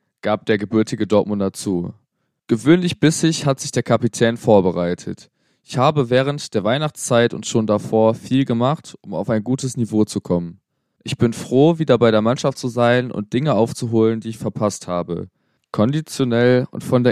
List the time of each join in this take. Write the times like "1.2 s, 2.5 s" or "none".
none